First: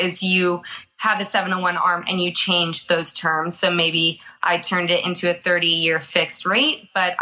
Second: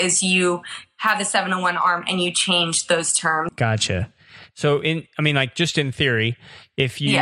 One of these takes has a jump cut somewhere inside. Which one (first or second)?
second